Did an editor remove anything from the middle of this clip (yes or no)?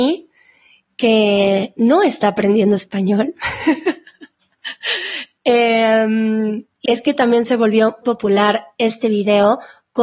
yes